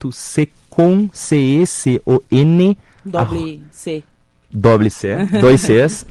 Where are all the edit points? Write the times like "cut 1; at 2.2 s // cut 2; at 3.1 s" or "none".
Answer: cut 1; at 1.7 s